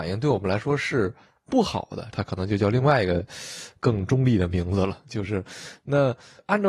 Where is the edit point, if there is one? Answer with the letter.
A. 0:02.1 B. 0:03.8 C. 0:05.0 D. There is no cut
A